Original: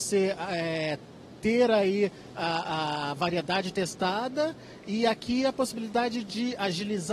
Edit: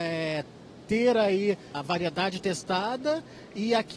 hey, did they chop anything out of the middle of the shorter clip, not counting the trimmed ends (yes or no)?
yes